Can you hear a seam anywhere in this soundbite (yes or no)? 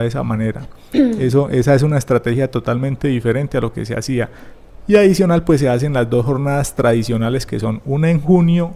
no